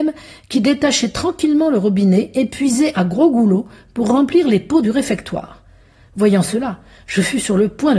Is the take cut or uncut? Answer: uncut